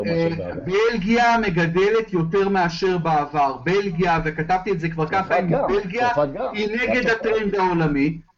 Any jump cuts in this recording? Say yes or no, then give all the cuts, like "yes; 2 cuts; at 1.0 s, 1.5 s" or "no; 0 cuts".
no; 0 cuts